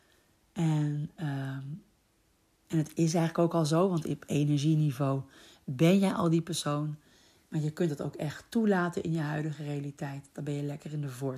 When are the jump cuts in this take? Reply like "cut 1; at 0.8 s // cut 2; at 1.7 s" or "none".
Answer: none